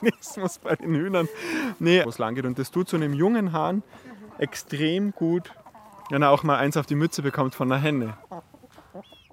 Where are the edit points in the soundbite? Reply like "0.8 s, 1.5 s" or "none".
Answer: 2.0 s